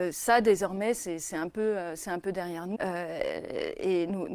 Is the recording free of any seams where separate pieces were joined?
no; 1 cut; at 2.7 s

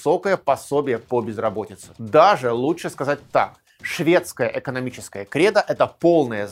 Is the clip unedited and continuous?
yes; 0 cuts

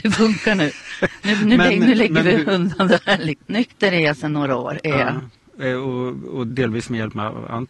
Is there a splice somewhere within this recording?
yes; 2 cuts; at 3.4 s, 6.5 s

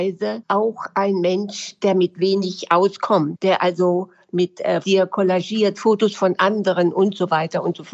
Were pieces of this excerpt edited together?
yes; 1 cut; at 4.8 s

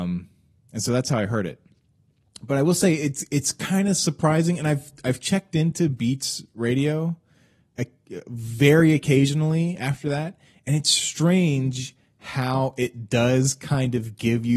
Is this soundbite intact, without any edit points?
yes; 0 cuts

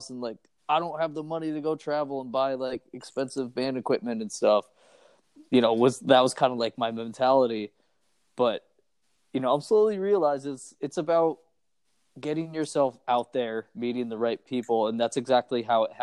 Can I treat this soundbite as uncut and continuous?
yes; 0 cuts

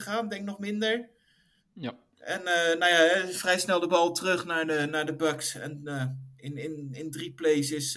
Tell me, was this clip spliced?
no; 0 cuts

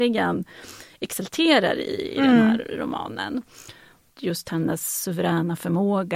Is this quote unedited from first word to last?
no; 1 cut; at 4.1 s

